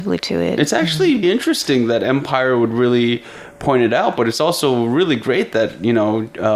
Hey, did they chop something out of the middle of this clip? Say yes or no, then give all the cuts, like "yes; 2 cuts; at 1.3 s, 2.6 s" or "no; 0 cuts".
yes; 1 cut; at 1.2 s